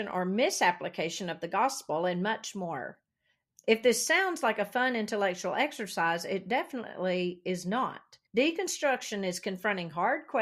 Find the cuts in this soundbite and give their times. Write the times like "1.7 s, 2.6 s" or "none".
3.5 s, 8.3 s